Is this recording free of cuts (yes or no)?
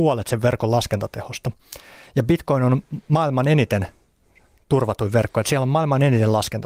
yes